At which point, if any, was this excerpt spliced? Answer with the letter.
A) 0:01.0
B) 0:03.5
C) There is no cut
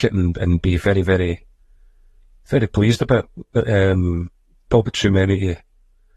C